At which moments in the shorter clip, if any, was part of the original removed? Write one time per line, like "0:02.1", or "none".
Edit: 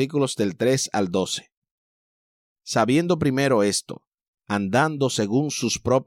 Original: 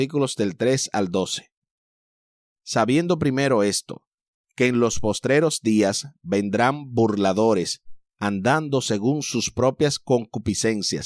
0:04.4